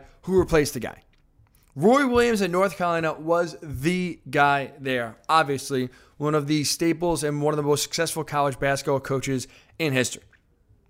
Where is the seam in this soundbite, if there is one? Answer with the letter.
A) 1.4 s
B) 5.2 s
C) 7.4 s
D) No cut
D